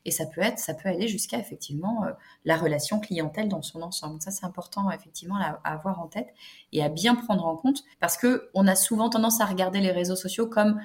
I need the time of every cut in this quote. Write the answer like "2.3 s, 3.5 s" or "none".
7.9 s